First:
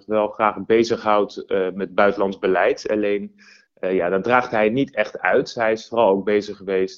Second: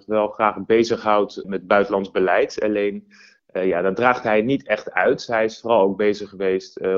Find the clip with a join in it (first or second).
second